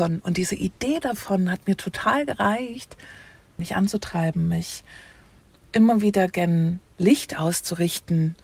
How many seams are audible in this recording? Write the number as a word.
two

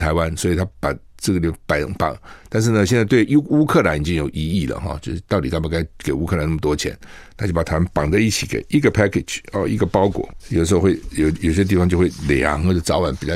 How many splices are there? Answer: one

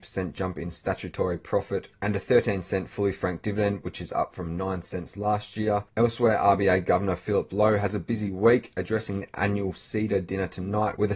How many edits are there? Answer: one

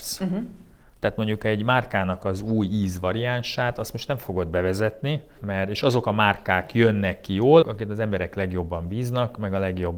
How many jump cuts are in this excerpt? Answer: two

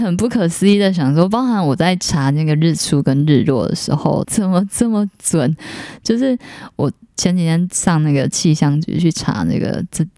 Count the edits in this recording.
one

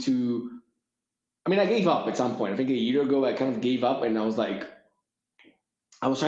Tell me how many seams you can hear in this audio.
zero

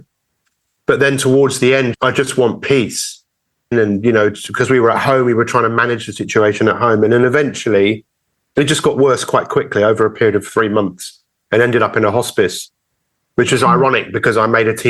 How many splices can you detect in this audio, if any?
two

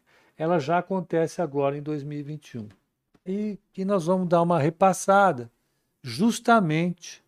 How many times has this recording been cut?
one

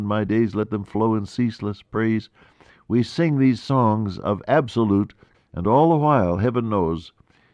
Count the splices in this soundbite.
one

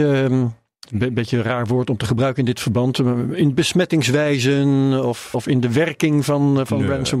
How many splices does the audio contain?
one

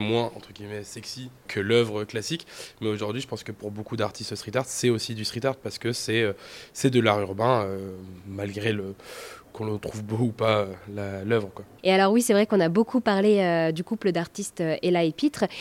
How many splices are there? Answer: one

